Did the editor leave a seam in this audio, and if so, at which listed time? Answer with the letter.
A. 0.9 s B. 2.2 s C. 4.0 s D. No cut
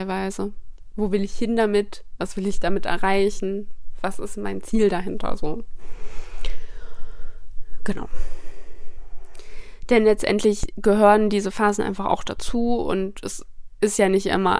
A